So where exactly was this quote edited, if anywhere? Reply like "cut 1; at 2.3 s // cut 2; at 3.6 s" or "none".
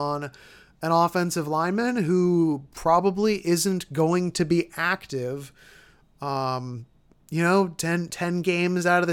none